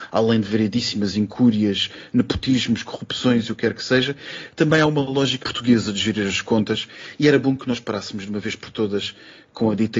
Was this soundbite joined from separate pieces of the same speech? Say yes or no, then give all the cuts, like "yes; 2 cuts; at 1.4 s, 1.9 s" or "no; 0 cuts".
yes; 1 cut; at 5.4 s